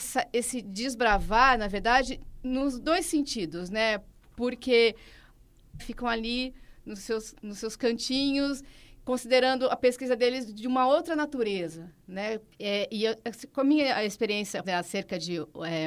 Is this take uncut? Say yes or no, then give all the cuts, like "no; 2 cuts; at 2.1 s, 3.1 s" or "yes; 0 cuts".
no; 3 cuts; at 5.8 s, 12.5 s, 14.6 s